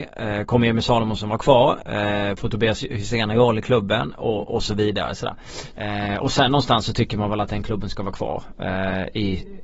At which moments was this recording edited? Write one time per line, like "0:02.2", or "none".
0:05.7

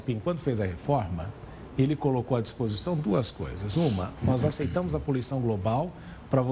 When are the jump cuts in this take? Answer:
none

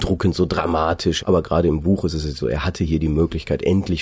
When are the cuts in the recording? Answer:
0:01.2
0:02.4

